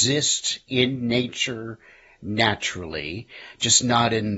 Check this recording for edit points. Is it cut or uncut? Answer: uncut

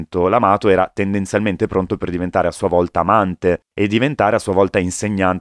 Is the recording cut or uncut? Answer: uncut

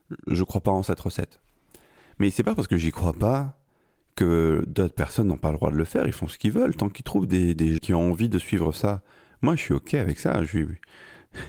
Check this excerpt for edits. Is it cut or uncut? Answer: cut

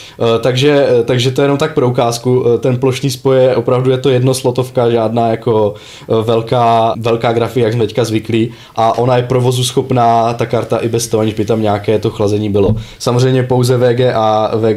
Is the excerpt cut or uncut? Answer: cut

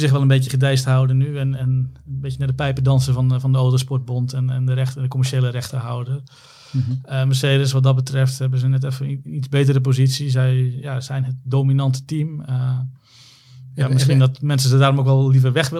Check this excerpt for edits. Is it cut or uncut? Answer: uncut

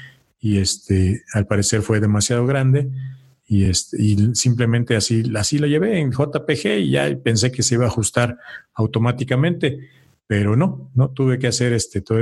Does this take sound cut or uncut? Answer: uncut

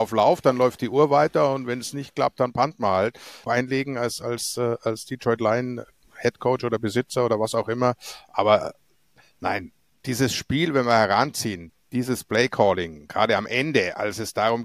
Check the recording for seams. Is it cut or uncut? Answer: cut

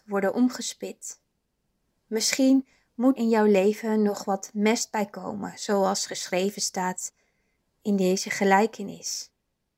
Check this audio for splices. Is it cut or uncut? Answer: cut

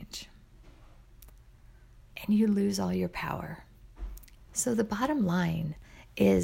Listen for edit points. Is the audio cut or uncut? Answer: cut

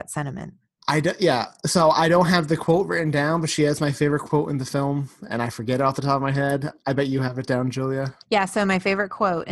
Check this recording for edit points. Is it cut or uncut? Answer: cut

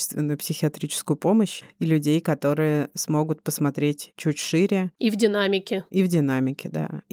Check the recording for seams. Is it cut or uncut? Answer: uncut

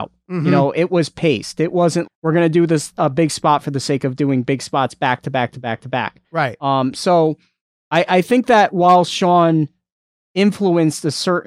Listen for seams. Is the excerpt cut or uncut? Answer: cut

